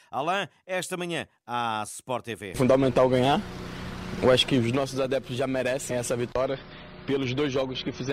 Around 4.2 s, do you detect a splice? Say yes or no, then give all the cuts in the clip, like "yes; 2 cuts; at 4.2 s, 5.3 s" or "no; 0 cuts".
no; 1 cut; at 5.9 s